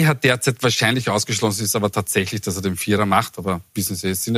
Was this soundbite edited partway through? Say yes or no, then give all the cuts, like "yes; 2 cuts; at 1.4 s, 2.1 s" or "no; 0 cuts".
no; 0 cuts